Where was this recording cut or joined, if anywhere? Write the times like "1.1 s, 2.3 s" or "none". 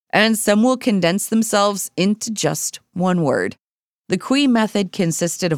4.0 s